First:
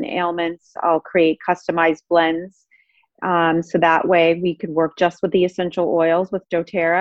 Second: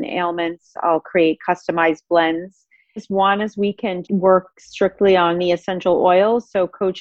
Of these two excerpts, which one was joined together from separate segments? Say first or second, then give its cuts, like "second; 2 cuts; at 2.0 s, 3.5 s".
second; 2 cuts; at 3.0 s, 4.0 s